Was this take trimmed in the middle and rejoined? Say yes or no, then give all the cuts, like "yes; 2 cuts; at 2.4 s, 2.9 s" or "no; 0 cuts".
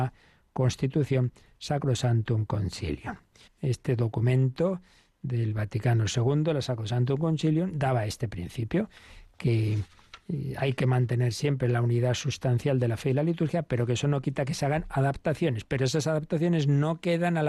yes; 1 cut; at 3.5 s